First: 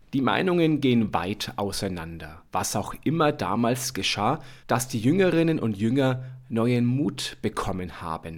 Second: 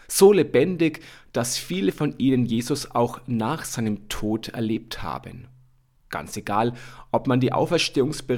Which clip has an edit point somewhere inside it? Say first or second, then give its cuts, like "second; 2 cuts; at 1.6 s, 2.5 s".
first; 2 cuts; at 2.5 s, 4.6 s